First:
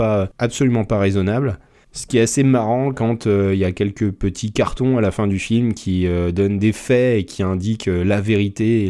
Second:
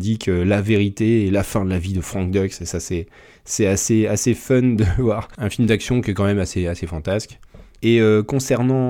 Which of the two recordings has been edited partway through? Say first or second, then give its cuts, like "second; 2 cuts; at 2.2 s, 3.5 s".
second; 1 cut; at 7.8 s